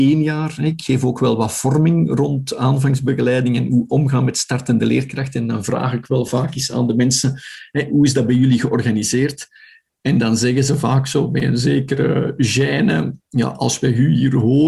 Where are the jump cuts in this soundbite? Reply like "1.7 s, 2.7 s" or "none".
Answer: none